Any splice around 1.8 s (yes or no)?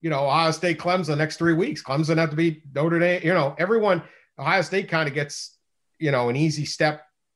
no